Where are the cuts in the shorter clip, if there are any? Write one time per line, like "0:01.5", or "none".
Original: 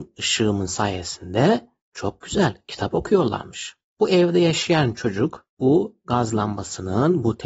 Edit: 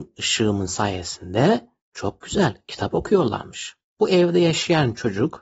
none